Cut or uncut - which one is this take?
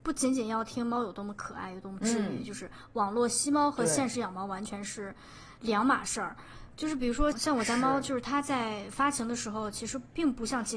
cut